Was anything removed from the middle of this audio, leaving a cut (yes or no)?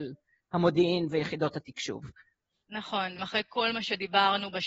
yes